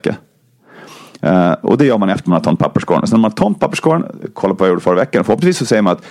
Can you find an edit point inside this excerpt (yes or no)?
no